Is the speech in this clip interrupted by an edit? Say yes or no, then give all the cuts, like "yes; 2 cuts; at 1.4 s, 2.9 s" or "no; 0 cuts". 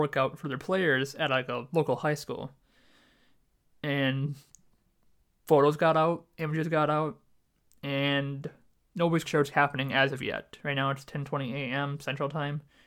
yes; 1 cut; at 9.3 s